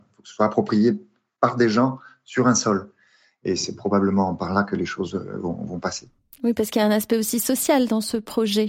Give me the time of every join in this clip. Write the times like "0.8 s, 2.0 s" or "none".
none